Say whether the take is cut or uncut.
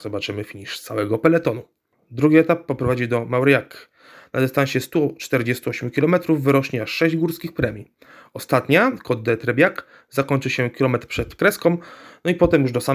uncut